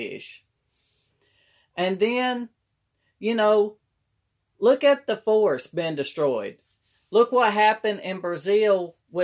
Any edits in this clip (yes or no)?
no